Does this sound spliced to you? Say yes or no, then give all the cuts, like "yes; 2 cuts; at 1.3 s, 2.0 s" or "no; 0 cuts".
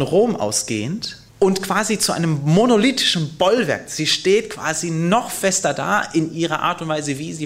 yes; 1 cut; at 1.3 s